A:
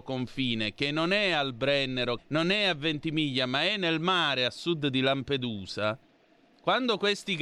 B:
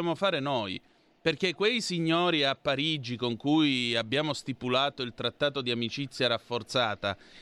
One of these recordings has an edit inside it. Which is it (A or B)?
A